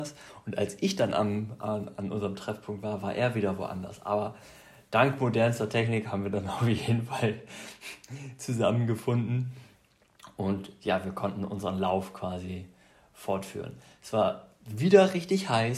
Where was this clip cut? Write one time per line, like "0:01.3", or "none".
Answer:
none